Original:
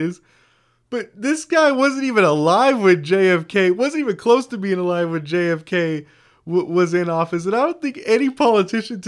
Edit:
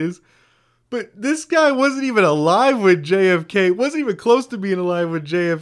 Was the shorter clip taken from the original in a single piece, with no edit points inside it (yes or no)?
yes